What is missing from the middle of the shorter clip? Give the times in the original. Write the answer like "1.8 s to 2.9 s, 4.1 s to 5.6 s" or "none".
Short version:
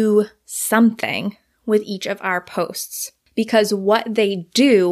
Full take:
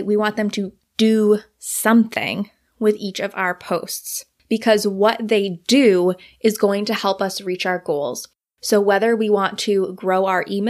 none